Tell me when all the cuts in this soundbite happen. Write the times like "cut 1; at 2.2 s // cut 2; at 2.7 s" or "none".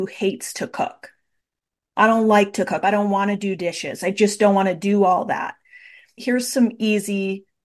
cut 1; at 2.8 s // cut 2; at 6.2 s